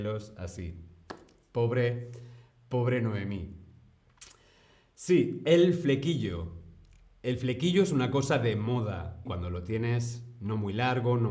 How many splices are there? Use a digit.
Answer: 1